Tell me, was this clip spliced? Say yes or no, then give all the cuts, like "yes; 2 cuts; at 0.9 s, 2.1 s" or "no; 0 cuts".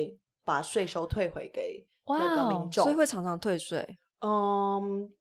no; 0 cuts